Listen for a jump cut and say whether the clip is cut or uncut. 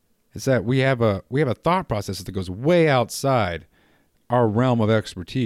uncut